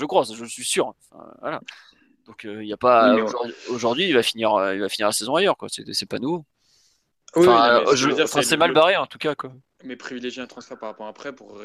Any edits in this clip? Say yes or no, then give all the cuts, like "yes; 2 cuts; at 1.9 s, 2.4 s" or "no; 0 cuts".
no; 0 cuts